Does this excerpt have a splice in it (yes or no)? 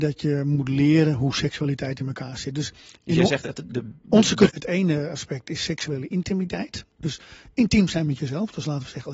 yes